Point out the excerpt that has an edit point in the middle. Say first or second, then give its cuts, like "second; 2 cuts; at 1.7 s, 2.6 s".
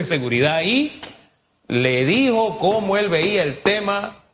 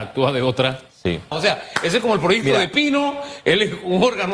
second; 1 cut; at 1.3 s